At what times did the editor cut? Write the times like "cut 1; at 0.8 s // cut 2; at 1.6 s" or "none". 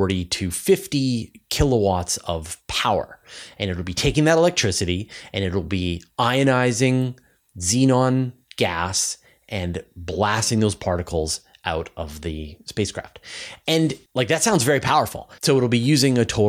cut 1; at 14.1 s // cut 2; at 15.4 s